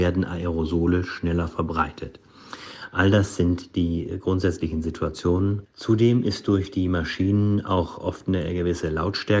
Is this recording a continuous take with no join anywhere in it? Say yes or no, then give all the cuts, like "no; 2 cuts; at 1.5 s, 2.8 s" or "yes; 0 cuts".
no; 1 cut; at 5.6 s